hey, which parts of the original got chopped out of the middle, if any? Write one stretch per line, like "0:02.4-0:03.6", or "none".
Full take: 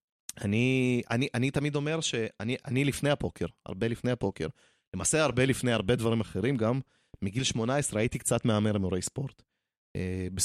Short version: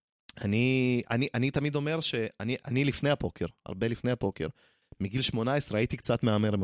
0:04.8-0:07.0